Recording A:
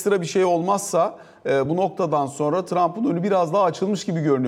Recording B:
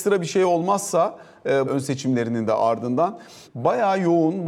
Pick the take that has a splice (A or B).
B